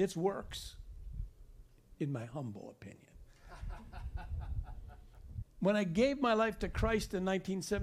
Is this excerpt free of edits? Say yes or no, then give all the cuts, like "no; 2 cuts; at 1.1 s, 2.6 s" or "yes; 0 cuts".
no; 1 cut; at 5.4 s